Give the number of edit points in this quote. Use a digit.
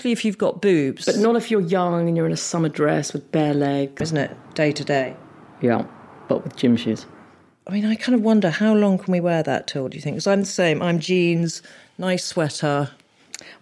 1